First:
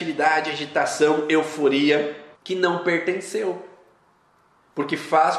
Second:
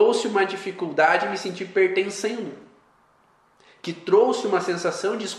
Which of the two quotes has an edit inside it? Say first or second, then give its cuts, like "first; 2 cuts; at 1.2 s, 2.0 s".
first; 1 cut; at 2.3 s